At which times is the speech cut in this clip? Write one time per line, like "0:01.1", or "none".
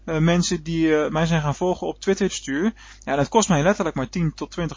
0:02.3